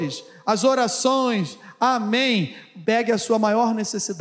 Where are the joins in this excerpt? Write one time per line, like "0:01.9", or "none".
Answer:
0:02.8